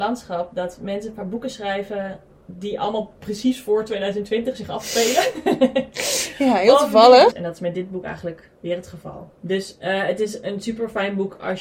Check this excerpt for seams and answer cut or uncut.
cut